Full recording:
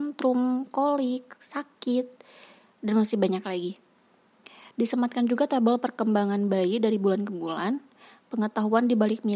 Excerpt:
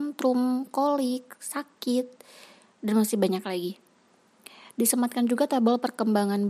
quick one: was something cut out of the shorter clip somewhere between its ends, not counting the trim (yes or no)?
no